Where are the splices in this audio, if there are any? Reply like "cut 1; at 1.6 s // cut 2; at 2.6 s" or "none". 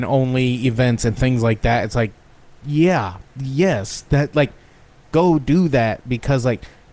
none

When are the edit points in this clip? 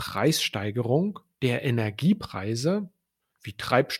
none

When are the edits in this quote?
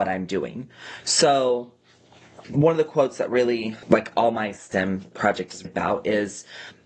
cut 1; at 5.6 s

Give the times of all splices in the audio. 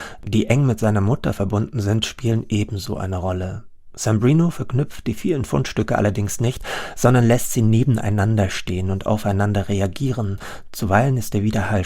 none

